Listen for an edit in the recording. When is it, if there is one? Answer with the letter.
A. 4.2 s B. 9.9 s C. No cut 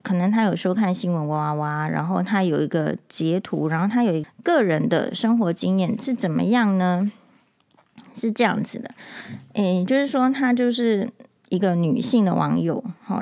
A